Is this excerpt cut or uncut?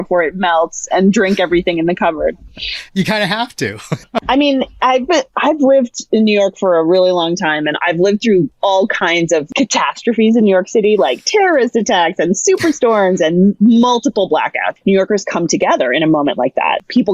cut